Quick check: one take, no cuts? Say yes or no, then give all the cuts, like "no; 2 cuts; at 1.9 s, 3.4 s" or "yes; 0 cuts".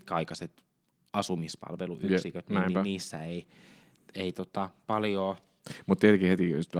yes; 0 cuts